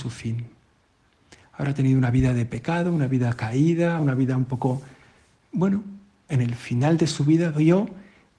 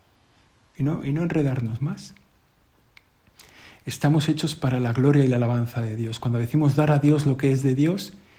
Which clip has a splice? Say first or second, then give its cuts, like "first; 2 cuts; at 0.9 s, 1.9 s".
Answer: first; 2 cuts; at 4.0 s, 6.3 s